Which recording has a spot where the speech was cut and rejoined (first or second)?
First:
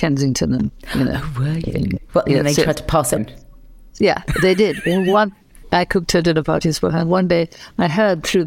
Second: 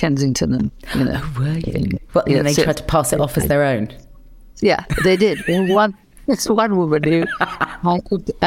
first